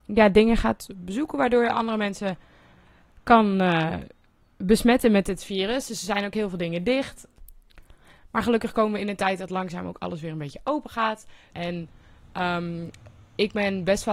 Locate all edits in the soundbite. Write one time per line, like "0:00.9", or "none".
0:11.5